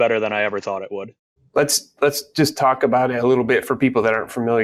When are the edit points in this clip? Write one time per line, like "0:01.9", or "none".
0:01.4